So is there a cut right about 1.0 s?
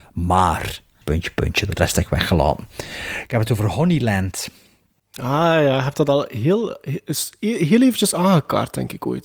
yes; 1 cut; at 1.0 s

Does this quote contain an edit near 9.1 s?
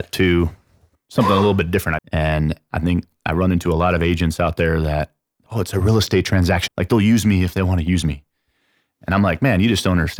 no; 3 cuts; at 2.0 s, 5.5 s, 6.7 s

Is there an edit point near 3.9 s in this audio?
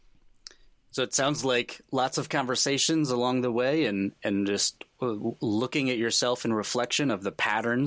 no; 0 cuts

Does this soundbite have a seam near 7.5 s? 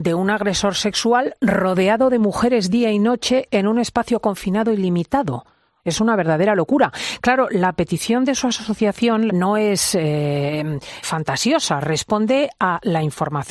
no; 3 cuts; at 5.8 s, 9.3 s, 11.0 s

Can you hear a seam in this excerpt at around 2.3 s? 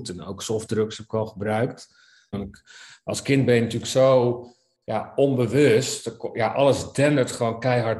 yes; 1 cut; at 2.3 s

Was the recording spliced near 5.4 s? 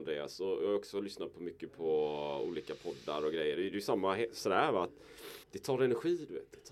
yes; 1 cut; at 5.4 s

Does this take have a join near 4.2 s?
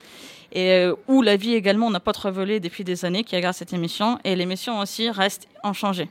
no; 0 cuts

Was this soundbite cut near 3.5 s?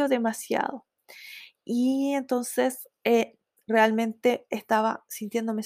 no; 0 cuts

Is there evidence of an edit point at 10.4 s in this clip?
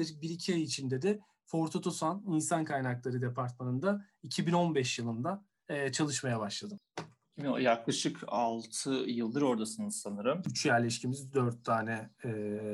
yes; 1 cut; at 10.4 s

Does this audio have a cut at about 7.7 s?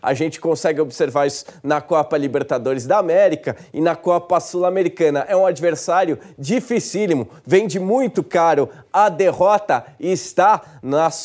no; 0 cuts

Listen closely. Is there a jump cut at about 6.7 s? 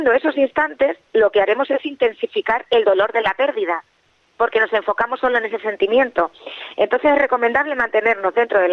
no; 0 cuts

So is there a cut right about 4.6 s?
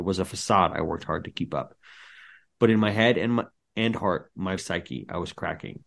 yes; 1 cut; at 4.6 s

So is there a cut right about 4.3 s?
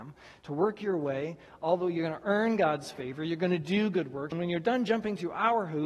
yes; 1 cut; at 4.3 s

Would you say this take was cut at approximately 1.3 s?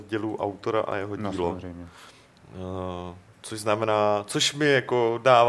no; 0 cuts

